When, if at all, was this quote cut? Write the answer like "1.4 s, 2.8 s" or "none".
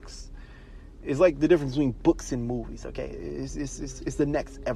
none